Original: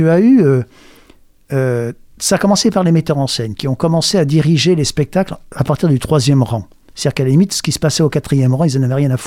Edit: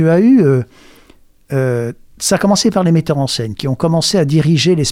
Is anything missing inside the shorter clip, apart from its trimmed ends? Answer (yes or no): no